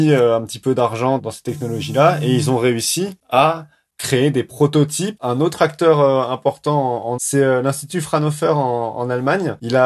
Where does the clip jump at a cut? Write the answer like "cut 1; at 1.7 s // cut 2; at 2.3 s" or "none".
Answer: cut 1; at 5.2 s // cut 2; at 7.2 s